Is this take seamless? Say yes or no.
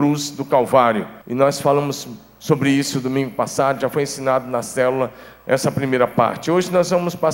no